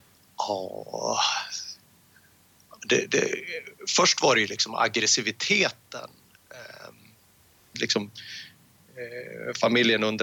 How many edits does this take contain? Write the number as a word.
one